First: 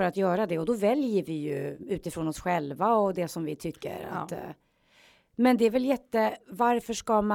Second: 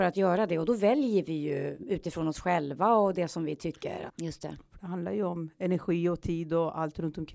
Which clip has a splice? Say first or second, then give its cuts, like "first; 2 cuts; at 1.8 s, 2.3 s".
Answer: second; 1 cut; at 4.1 s